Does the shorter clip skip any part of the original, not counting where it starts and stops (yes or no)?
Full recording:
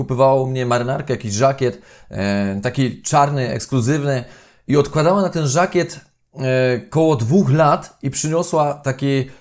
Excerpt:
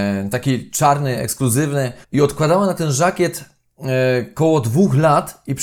yes